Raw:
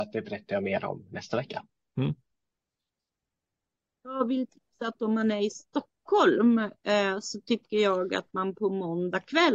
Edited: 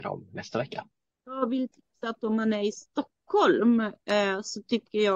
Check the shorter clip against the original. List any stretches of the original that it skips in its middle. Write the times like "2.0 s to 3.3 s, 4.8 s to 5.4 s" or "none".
1.9 s to 3.9 s